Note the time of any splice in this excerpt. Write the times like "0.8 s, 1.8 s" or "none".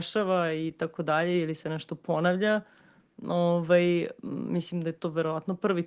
none